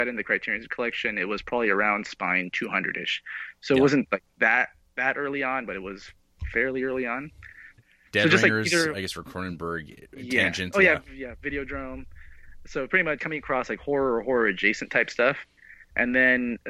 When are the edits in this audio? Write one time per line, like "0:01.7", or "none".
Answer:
0:07.8
0:13.2